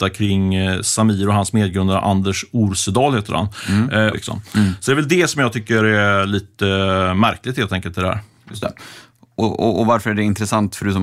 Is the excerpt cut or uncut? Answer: cut